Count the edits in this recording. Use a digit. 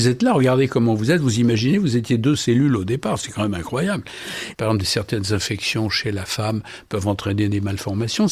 1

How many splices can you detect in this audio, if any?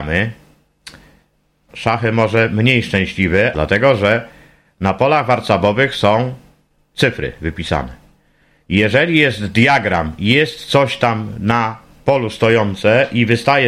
2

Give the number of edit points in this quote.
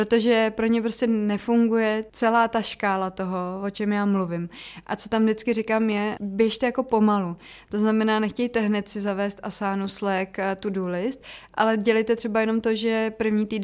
0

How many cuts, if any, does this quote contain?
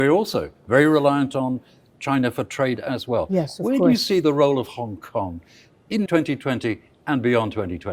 1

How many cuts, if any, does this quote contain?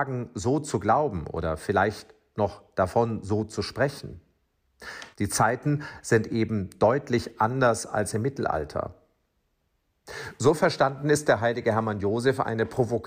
1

